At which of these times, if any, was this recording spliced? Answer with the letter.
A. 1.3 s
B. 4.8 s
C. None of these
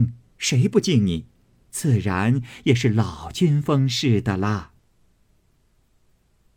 C